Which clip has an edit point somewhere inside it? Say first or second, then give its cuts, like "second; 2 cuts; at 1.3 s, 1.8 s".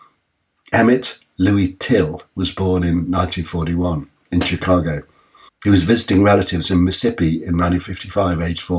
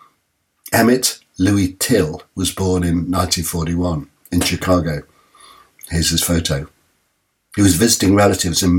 first; 1 cut; at 5.5 s